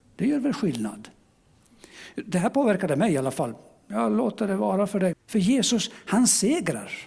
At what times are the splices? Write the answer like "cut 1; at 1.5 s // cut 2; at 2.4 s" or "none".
cut 1; at 5.1 s

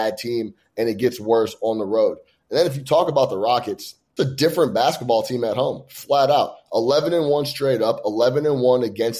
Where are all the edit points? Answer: cut 1; at 4.2 s

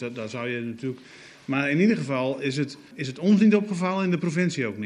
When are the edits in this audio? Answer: cut 1; at 2.9 s

